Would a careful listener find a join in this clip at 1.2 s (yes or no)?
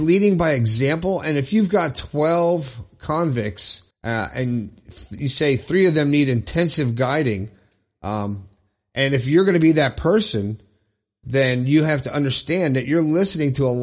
no